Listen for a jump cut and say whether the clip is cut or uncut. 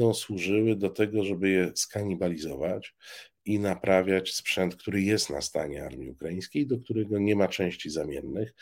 uncut